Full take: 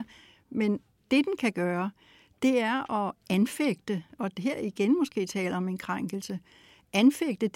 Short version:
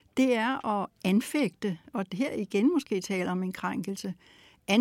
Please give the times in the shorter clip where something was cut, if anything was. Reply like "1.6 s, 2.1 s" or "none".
none